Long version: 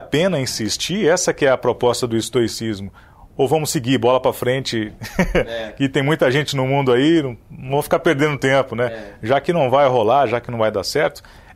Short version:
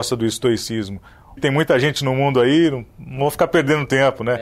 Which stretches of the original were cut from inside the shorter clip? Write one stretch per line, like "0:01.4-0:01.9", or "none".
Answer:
0:03.3-0:05.9